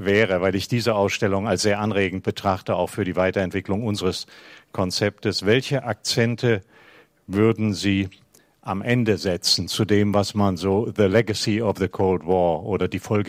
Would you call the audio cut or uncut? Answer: uncut